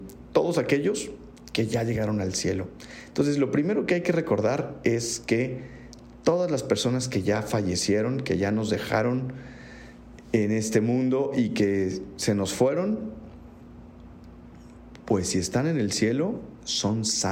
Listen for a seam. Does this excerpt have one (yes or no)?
no